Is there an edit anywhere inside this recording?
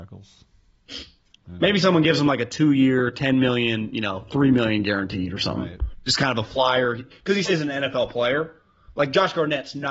yes; 2 cuts; at 1.4 s, 7.4 s

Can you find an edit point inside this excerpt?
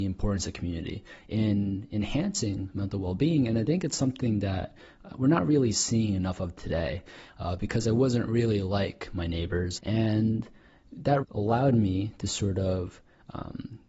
yes; 3 cuts; at 7.3 s, 9.8 s, 11.2 s

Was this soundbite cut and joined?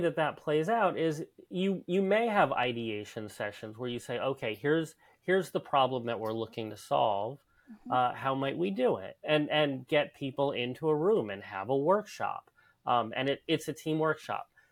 no; 0 cuts

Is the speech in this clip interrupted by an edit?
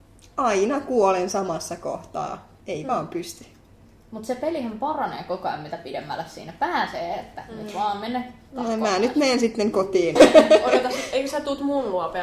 yes; 2 cuts; at 2.6 s, 10.2 s

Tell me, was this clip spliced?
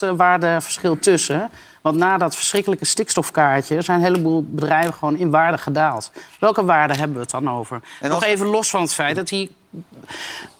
no; 0 cuts

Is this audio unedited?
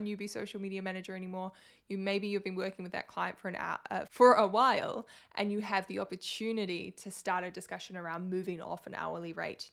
no; 1 cut; at 4.1 s

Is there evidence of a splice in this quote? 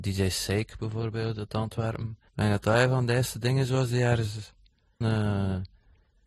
yes; 2 cuts; at 2.3 s, 5.0 s

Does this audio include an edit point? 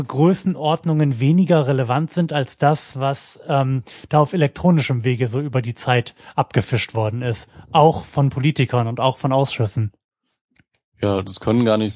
no; 0 cuts

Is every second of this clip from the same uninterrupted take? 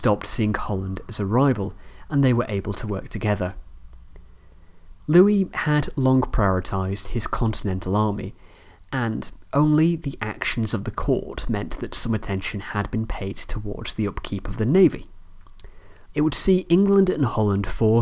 no; 2 cuts; at 5.0 s, 16.1 s

